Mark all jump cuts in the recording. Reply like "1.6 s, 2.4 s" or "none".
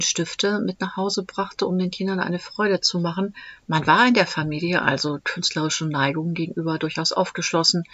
3.6 s